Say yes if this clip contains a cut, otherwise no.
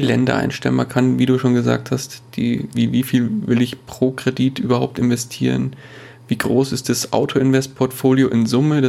yes